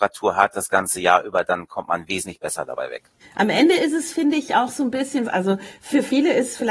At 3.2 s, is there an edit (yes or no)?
yes